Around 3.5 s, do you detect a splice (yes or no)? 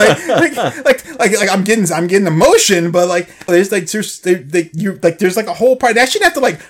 yes